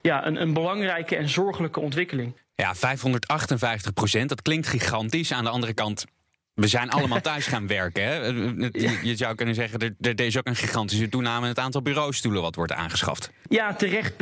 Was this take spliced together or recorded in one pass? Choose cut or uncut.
uncut